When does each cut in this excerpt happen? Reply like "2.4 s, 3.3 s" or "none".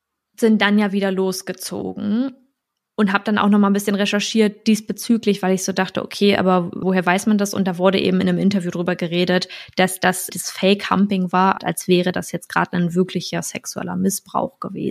6.8 s, 10.3 s, 11.6 s